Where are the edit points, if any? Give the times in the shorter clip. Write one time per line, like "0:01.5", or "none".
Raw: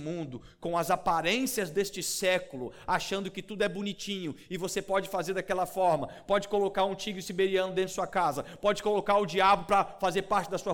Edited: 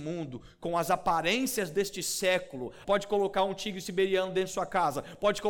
0:02.8

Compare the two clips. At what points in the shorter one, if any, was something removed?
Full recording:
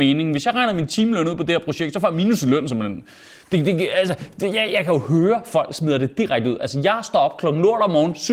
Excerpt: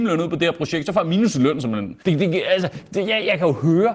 0:02.0

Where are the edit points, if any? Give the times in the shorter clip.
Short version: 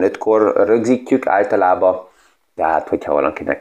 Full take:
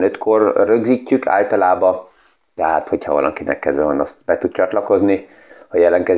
none

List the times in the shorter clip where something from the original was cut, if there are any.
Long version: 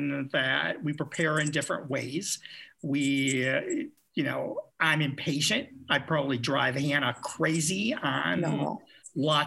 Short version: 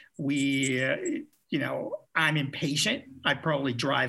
none

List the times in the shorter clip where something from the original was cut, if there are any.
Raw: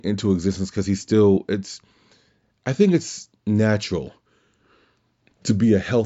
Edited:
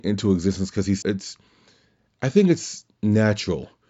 0:01.0

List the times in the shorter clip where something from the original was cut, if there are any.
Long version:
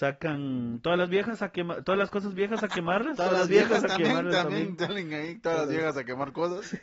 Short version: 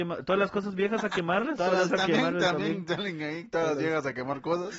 0:01.9

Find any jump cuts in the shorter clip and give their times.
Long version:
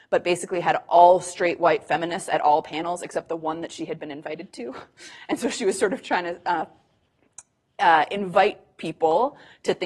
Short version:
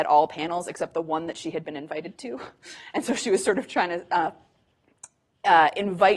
none

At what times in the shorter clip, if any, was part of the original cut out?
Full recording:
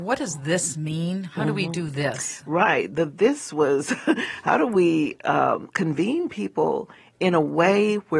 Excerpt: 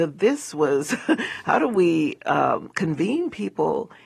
none

